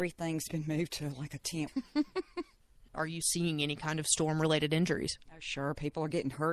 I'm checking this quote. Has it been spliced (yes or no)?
yes